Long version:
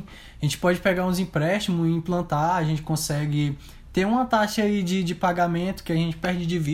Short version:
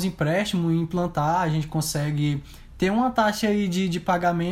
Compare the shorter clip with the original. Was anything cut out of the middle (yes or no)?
no